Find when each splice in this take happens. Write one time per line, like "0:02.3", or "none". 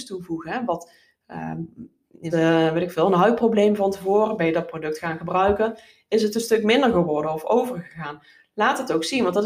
0:02.3